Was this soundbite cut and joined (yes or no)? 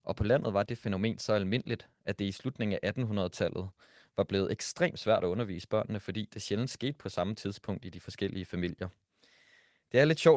no